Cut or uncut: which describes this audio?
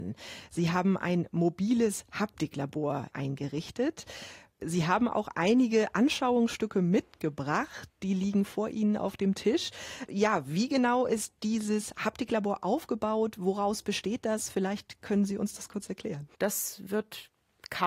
cut